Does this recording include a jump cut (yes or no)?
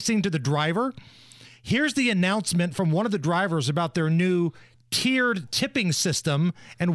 no